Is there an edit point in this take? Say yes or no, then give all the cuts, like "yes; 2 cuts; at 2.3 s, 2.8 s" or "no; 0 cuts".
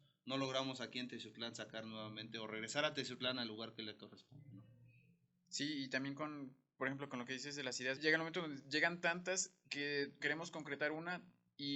yes; 2 cuts; at 8.0 s, 10.2 s